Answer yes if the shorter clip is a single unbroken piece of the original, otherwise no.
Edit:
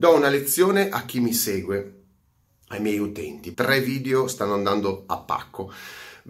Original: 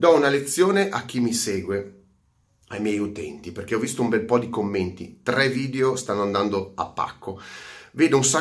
no